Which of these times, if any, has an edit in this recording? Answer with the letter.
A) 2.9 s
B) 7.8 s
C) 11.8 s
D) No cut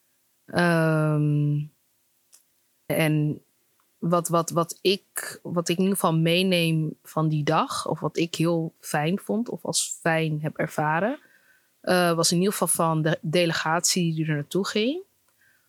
A